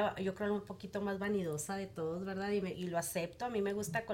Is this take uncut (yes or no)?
yes